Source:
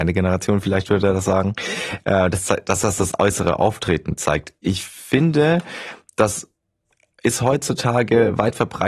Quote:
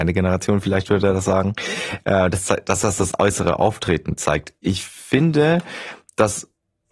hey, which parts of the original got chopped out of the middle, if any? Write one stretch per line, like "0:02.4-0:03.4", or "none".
none